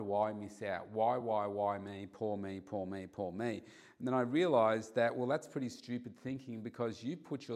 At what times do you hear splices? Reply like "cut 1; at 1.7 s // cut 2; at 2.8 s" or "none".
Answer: none